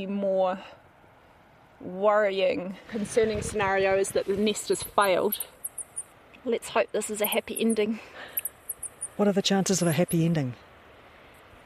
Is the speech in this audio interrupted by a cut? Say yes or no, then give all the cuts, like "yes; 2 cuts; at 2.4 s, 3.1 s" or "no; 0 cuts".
no; 0 cuts